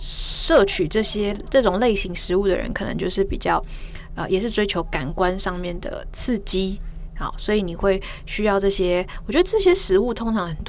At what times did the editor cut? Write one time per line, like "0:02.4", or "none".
none